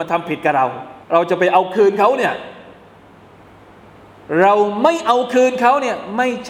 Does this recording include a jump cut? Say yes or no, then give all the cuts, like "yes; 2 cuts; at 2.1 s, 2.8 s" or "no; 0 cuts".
yes; 1 cut; at 1.0 s